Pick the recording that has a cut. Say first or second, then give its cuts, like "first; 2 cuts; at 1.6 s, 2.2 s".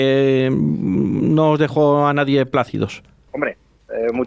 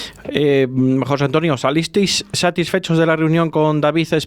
first; 1 cut; at 3.3 s